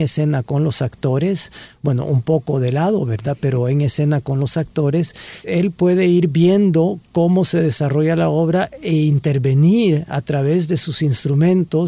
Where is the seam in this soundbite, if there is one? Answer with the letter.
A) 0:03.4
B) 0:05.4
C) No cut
B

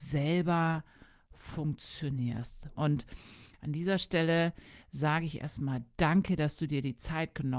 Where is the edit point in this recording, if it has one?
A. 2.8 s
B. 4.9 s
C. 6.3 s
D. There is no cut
A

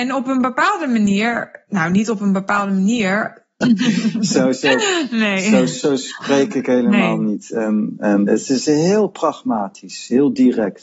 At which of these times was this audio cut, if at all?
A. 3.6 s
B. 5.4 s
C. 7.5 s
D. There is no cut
A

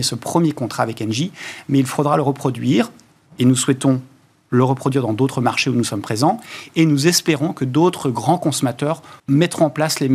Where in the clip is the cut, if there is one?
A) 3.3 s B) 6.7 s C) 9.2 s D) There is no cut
C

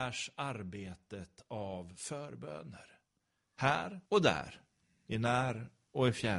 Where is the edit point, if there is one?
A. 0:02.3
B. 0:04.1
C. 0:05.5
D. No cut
B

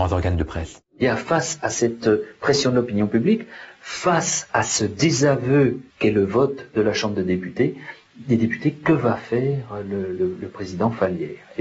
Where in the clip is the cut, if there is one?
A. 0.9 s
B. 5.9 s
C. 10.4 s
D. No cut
B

